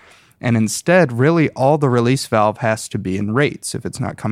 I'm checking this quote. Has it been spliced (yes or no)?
no